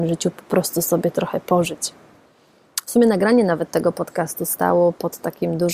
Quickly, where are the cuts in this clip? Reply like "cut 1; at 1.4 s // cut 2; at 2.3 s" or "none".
none